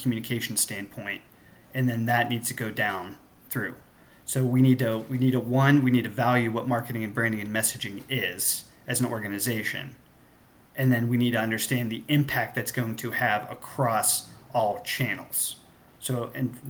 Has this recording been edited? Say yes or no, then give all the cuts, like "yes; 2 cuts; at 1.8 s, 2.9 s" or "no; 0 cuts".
no; 0 cuts